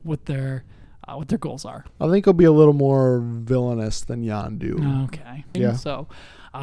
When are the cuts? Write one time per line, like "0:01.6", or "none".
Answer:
0:05.5